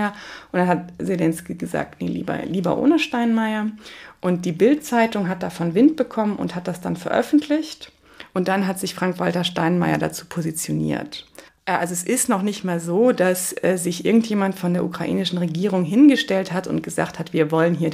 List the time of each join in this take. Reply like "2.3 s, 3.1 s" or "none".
none